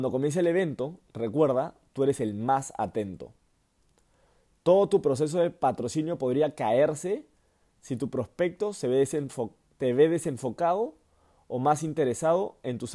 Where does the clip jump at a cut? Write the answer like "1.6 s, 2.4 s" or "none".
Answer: none